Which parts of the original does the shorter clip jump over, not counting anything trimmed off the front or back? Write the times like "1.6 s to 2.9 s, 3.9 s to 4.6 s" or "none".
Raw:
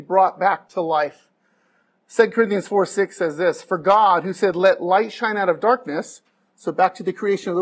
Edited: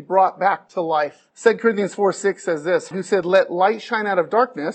1.3 s to 2.0 s, 3.6 s to 4.2 s

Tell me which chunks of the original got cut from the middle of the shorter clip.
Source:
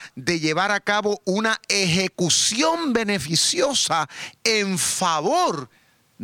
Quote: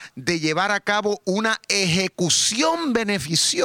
none

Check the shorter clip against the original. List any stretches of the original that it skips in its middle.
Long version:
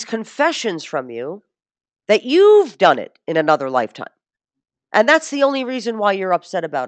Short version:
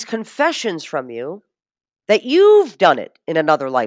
none

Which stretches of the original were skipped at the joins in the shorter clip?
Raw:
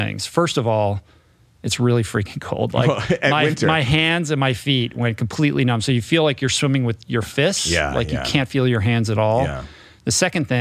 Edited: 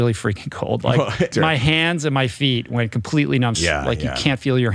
3.2 s to 3.6 s, 5.8 s to 7.6 s

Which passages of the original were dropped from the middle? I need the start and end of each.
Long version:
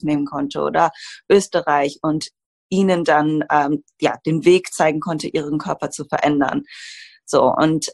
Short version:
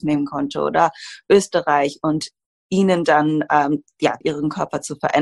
4.2 s to 5.3 s

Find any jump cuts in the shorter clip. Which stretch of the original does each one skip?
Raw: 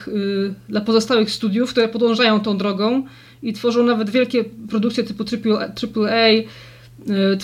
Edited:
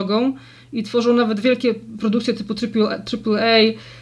none

